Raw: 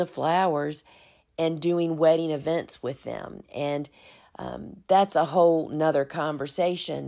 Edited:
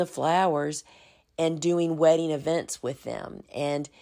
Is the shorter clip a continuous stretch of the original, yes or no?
yes